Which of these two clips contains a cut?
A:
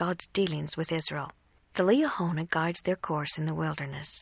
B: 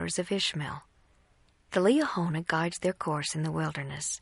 A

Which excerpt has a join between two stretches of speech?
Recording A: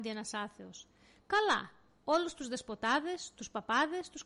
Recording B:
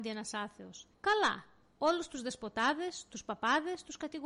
B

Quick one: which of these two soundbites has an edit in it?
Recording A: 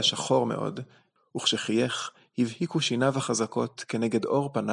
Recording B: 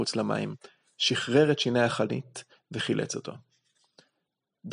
A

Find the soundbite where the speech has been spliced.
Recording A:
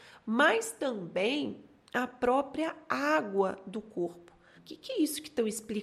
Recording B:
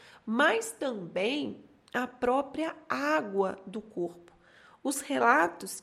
A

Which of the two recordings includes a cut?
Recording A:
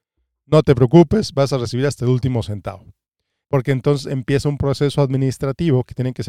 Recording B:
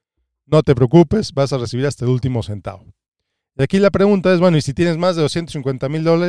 A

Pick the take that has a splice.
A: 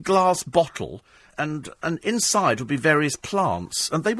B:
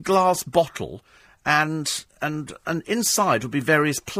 A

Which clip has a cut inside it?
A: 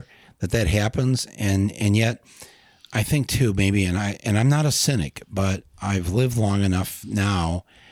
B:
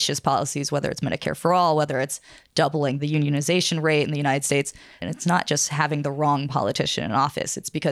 B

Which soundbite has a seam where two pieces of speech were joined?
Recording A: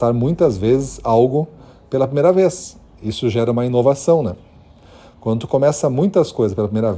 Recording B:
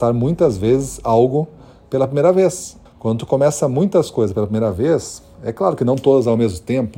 B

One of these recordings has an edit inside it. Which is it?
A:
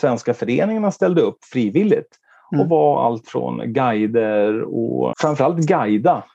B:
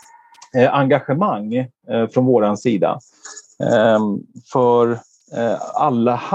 A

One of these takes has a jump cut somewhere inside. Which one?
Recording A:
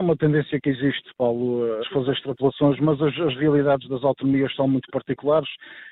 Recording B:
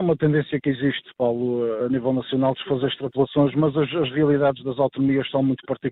A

